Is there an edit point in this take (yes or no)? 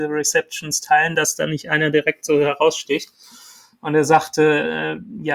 no